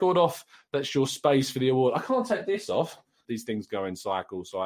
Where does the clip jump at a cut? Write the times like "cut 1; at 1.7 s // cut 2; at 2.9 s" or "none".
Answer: cut 1; at 3.2 s